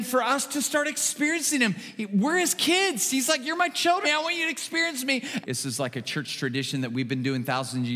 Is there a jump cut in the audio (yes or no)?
yes